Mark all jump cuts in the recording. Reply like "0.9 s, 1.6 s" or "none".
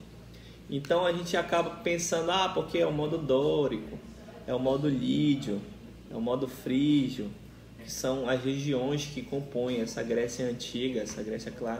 7.8 s